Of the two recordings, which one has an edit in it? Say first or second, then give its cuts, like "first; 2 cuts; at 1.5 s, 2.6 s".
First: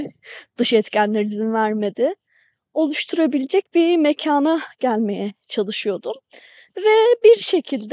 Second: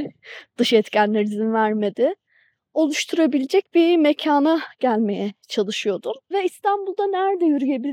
second; 1 cut; at 6.3 s